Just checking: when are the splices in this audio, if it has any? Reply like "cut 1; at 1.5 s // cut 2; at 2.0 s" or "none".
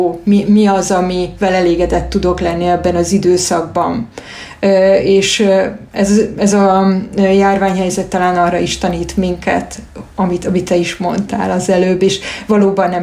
cut 1; at 10.1 s